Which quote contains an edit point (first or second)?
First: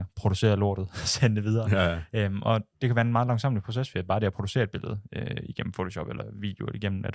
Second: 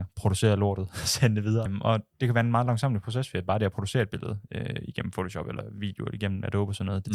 second